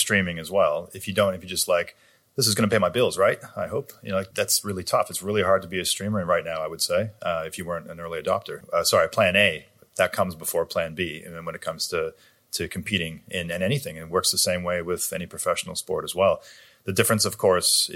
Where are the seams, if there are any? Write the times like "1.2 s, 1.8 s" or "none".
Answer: 4.3 s, 8.6 s